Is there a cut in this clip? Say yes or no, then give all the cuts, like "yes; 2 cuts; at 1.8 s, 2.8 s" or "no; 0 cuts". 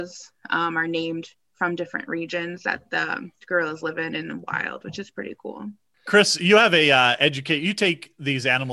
no; 0 cuts